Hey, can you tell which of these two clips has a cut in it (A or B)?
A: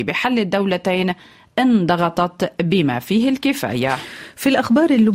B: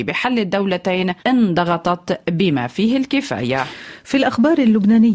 B